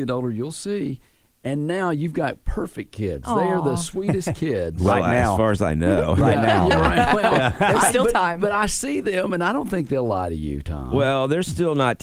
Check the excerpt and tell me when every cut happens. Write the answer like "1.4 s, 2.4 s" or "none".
none